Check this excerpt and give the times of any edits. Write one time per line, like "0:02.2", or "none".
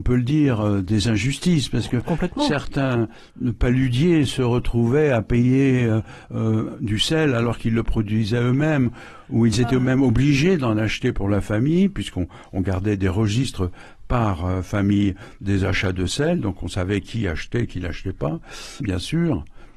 0:18.8

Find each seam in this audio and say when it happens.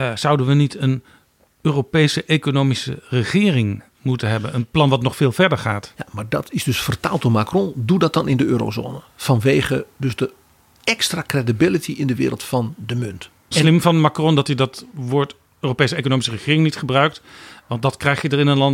0:13.5

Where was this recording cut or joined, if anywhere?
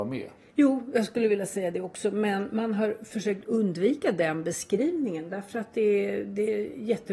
none

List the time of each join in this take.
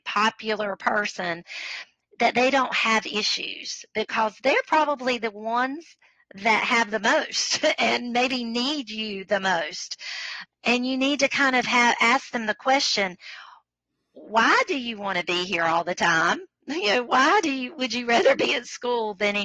none

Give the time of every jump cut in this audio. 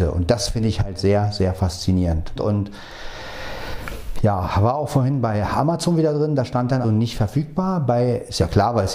0:02.4
0:06.8

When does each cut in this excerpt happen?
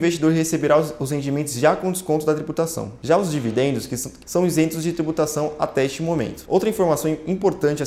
0:04.2
0:06.4

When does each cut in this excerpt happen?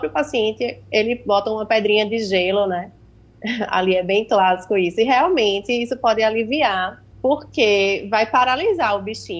0:07.1

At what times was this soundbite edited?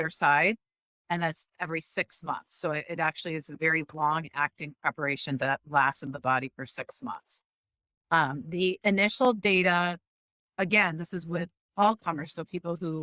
none

